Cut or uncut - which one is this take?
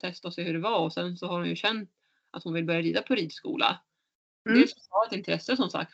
uncut